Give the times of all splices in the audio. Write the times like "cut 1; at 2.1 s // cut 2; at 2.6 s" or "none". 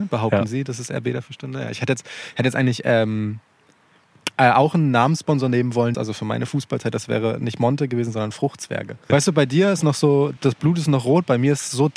cut 1; at 5.9 s // cut 2; at 9.1 s // cut 3; at 10.4 s